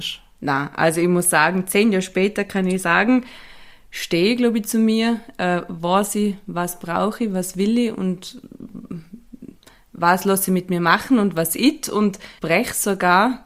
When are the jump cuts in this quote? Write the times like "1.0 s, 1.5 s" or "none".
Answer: 12.4 s